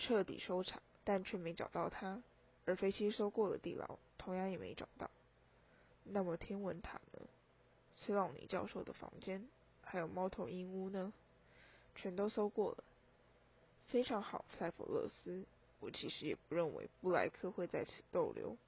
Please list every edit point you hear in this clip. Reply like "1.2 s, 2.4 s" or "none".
1.0 s

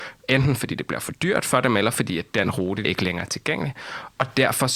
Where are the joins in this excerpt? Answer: 2.8 s

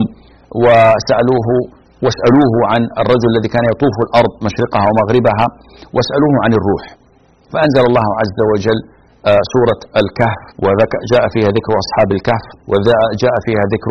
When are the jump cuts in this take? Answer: 10.5 s, 12.6 s

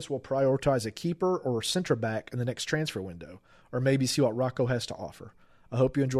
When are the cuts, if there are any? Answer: none

